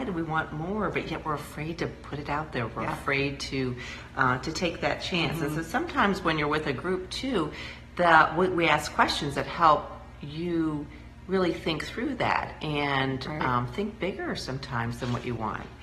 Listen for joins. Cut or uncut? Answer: uncut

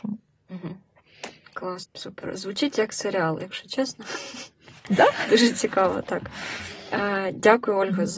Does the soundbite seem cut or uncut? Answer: cut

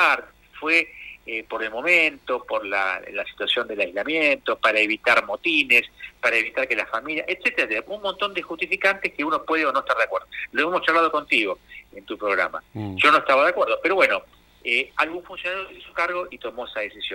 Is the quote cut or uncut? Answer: uncut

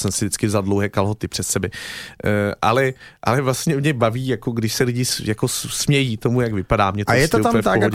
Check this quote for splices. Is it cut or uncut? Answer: uncut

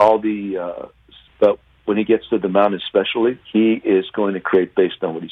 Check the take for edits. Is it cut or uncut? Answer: cut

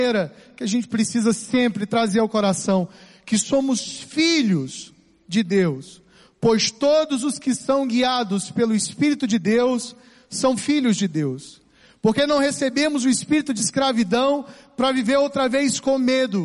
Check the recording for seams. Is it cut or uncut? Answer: uncut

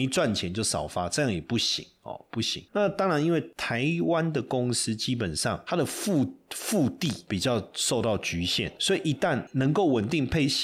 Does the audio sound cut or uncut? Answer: uncut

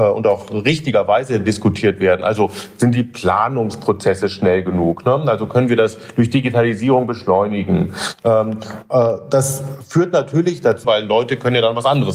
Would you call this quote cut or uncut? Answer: cut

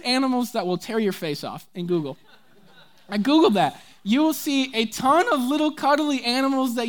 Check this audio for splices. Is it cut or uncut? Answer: uncut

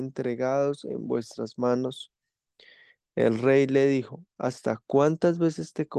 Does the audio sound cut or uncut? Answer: uncut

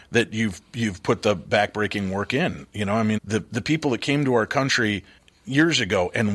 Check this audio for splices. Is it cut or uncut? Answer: cut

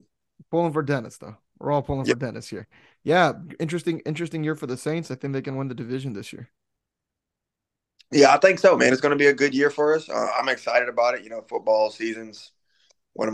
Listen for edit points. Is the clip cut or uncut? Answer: uncut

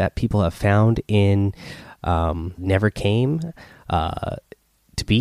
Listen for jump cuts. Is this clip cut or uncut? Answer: cut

